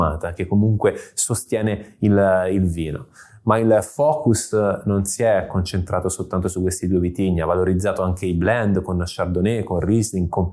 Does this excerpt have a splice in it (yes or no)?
no